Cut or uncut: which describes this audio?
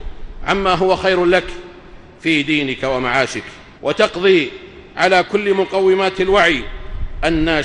cut